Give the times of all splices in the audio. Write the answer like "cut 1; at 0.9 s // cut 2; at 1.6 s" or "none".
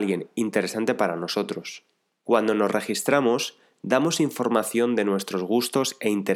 cut 1; at 2.1 s